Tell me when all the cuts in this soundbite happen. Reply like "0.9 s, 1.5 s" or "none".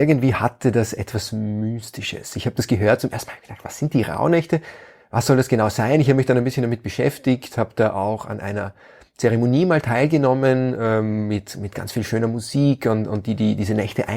none